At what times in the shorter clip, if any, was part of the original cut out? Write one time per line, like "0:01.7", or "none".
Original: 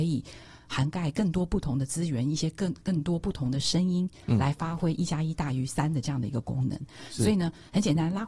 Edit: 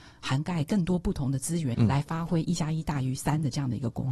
0:01.7